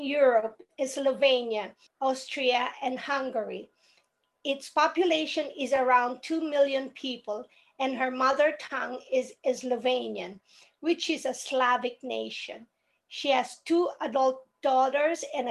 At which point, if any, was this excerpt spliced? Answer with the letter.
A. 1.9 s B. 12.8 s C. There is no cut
A